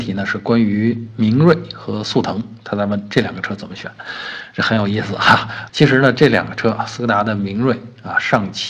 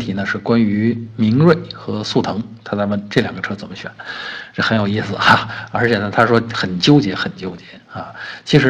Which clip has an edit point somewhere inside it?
first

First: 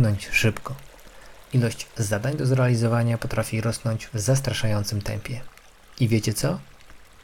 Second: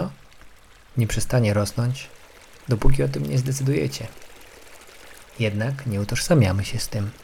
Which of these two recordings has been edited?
second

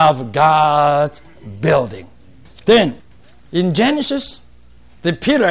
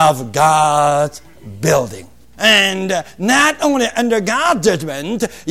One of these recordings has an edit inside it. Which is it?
second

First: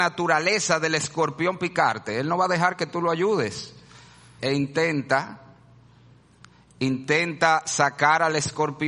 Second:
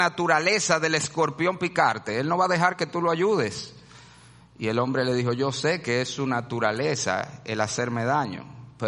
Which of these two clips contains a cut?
first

